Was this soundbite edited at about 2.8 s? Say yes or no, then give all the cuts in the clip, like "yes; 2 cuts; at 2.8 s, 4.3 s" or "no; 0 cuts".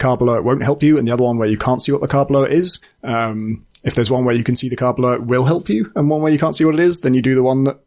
yes; 1 cut; at 2.8 s